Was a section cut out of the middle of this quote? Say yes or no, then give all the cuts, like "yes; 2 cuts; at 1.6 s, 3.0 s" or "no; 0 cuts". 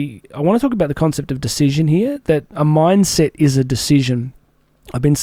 no; 0 cuts